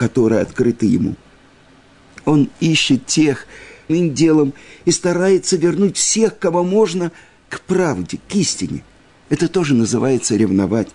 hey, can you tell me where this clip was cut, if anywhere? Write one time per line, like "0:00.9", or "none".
0:03.9